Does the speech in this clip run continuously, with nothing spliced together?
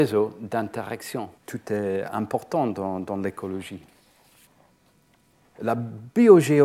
no; 1 cut; at 1.4 s

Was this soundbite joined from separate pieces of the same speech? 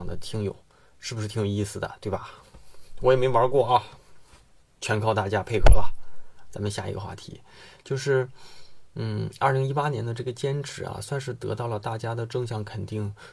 no; 0 cuts

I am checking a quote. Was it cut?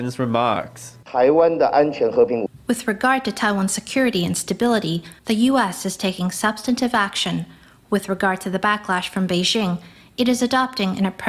no; 0 cuts

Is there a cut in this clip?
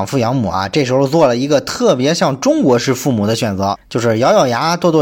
yes; 1 cut; at 3.8 s

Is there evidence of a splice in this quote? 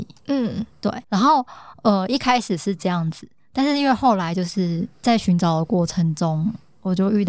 yes; 1 cut; at 1.0 s

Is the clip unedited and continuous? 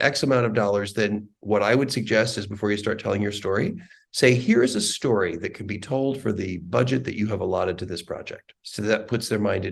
no; 1 cut; at 8.6 s

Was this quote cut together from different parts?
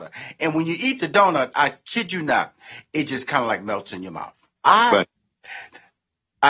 yes; 1 cut; at 4.6 s

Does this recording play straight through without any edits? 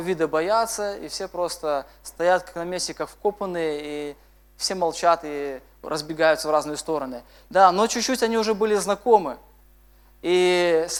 no; 1 cut; at 7.5 s

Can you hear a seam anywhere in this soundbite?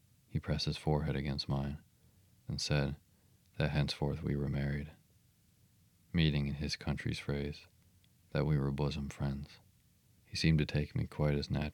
yes; 2 cuts; at 2.5 s, 10.1 s

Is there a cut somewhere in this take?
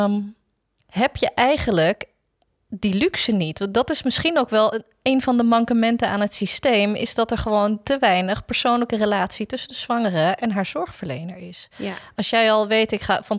no; 0 cuts

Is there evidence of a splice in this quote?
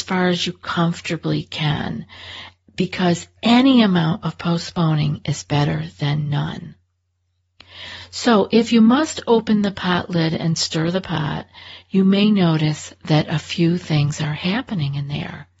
no; 0 cuts

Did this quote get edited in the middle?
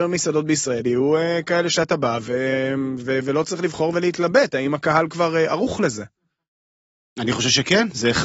no; 0 cuts

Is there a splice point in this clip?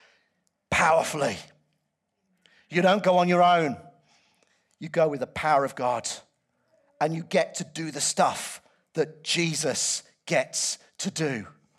no; 0 cuts

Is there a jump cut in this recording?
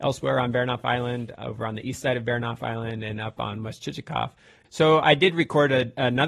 yes; 1 cut; at 4.6 s

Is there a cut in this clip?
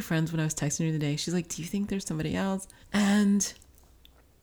yes; 1 cut; at 2.8 s

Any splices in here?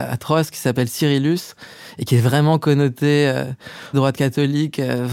yes; 1 cut; at 3.9 s

